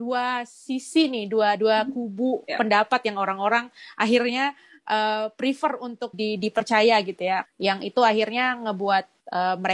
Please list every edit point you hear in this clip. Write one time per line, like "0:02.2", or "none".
0:06.1
0:07.5